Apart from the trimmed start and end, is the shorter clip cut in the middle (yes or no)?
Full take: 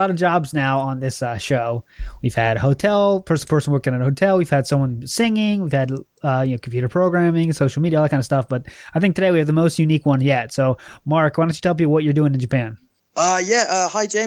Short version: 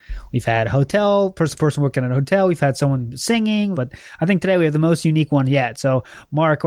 yes